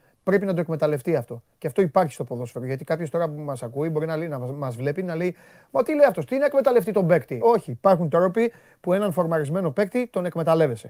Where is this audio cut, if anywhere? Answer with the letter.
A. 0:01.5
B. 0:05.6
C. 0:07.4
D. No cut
C